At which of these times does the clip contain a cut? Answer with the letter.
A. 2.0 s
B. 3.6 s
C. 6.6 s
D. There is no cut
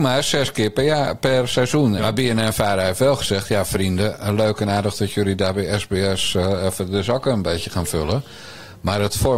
A